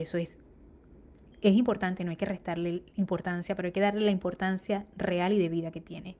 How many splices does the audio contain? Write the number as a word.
zero